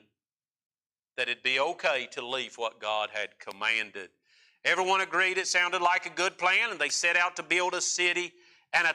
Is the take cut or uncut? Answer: uncut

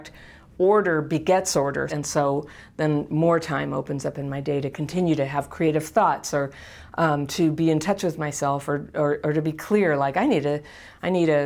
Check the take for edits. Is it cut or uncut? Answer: cut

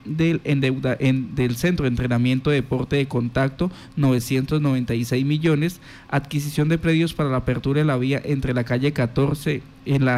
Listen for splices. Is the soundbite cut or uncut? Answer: uncut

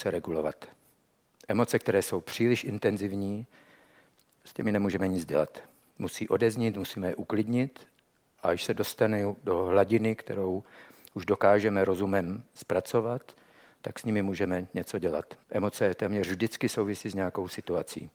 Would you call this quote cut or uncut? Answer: cut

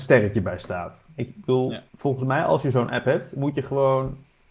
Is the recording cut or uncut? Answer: cut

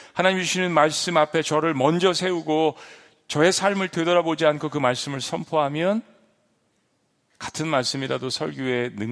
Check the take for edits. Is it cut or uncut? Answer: uncut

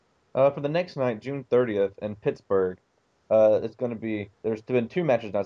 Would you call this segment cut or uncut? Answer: cut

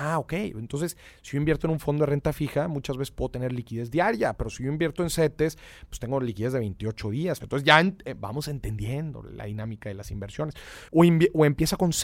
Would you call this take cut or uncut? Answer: cut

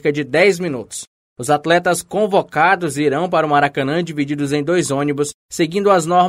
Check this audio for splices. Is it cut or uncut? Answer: cut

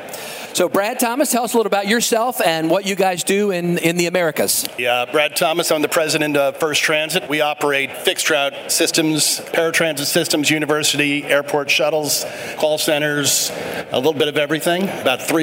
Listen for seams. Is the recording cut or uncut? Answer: cut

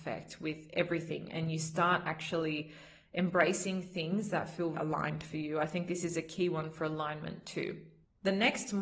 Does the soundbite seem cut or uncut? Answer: cut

